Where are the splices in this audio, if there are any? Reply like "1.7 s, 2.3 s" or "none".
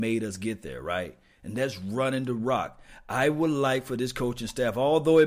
none